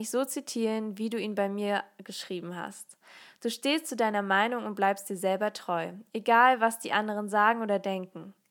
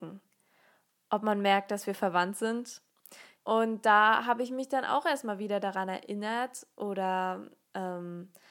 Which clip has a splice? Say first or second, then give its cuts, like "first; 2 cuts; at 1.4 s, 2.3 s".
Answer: second; 1 cut; at 3.4 s